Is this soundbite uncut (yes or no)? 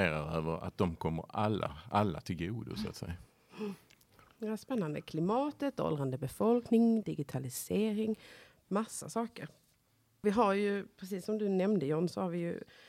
no